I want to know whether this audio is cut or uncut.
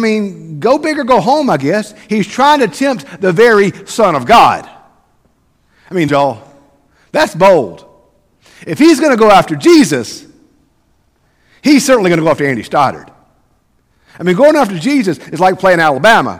cut